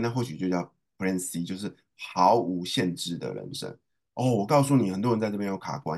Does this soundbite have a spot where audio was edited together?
no; 0 cuts

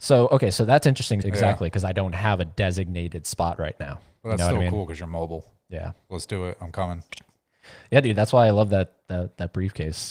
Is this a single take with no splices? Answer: no; 2 cuts; at 1.2 s, 7.1 s

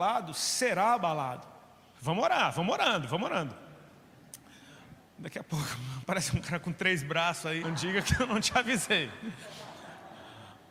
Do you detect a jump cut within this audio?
yes; 3 cuts; at 1.9 s, 5.0 s, 7.6 s

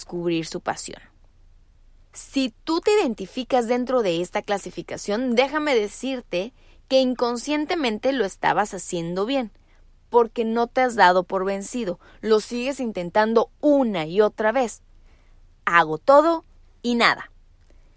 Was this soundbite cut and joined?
yes; 1 cut; at 15.6 s

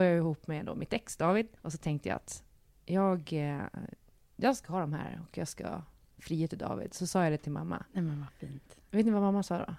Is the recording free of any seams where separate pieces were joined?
no; 1 cut; at 1.6 s

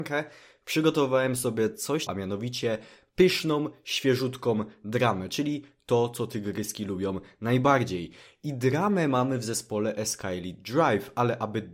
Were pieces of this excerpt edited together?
yes; 1 cut; at 2.1 s

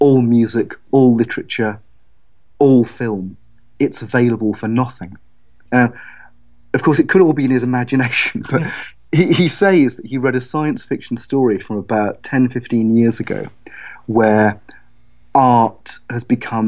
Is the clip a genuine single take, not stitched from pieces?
no; 1 cut; at 5.7 s

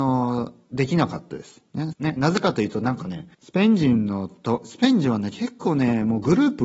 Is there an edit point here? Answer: yes; 2 cuts; at 1.9 s, 3.3 s

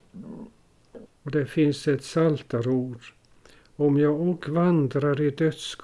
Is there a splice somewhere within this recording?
yes; 1 cut; at 1.1 s

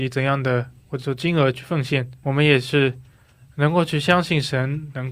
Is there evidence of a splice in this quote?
yes; 1 cut; at 2.2 s

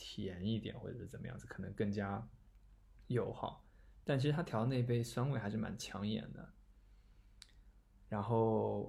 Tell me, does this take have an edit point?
no; 0 cuts

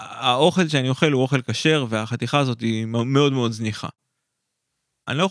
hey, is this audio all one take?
yes; 0 cuts

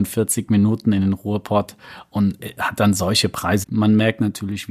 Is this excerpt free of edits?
no; 1 cut; at 3.6 s

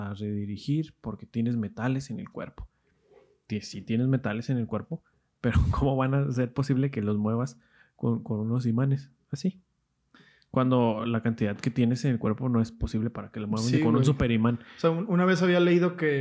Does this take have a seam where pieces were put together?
no; 0 cuts

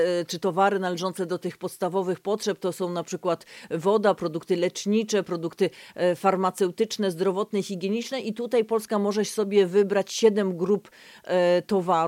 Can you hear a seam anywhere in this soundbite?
no; 0 cuts

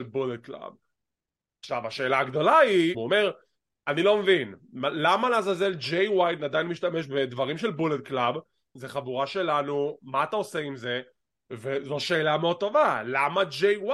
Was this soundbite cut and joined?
yes; 2 cuts; at 2.9 s, 8.8 s

